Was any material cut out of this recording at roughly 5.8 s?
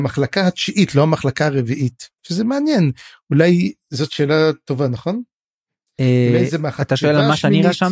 no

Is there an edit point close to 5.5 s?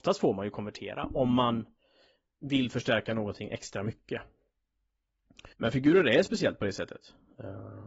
yes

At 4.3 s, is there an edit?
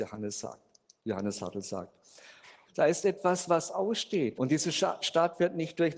yes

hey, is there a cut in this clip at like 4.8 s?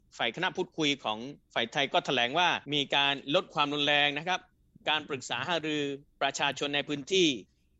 no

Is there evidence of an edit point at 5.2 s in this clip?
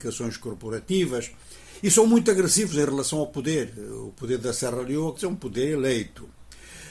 yes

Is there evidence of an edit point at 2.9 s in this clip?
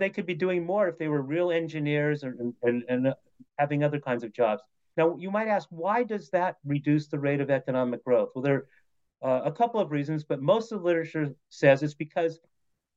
no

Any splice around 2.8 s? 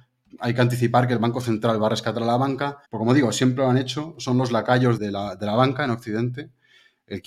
yes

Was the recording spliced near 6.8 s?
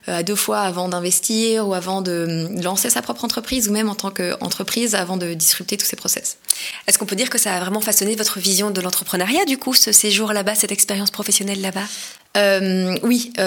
no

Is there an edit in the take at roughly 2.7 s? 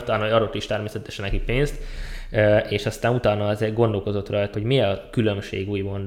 no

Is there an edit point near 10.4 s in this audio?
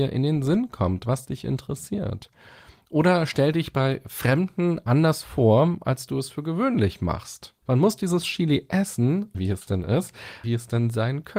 yes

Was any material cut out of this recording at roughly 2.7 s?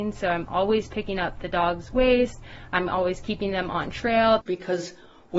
no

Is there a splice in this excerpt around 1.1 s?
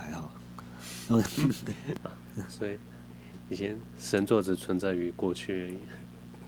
no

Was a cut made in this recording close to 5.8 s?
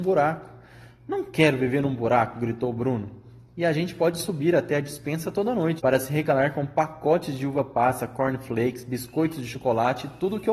yes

